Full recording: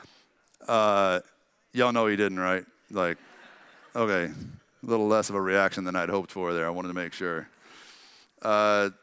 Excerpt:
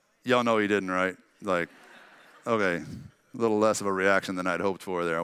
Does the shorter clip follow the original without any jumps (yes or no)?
yes